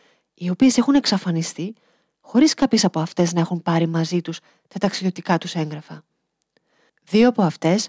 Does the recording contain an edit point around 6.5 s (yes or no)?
no